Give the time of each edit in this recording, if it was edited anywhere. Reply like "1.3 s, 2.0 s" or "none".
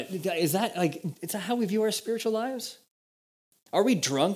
1.1 s